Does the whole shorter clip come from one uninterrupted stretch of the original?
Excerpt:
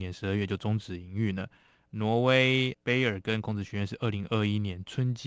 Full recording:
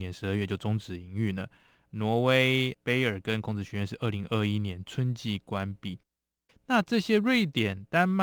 yes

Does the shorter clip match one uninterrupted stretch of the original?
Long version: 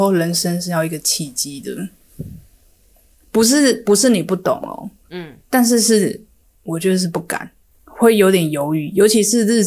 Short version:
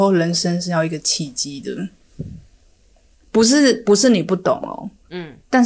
yes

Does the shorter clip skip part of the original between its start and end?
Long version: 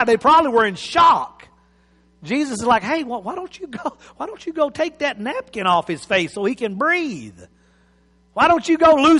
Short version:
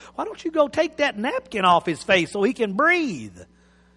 no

